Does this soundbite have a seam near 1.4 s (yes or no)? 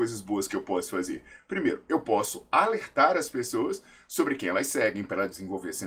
no